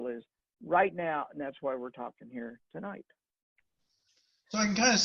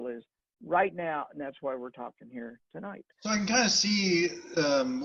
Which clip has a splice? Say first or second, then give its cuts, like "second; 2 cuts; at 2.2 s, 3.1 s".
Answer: second; 1 cut; at 3.1 s